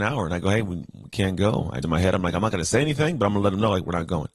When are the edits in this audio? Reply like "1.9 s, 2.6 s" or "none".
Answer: 1.8 s